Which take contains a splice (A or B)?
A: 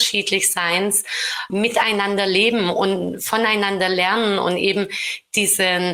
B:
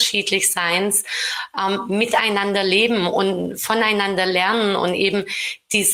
A